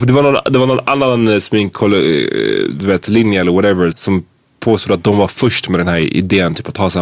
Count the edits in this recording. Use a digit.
1